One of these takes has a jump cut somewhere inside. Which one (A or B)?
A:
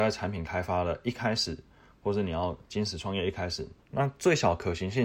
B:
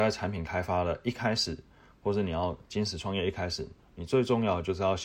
A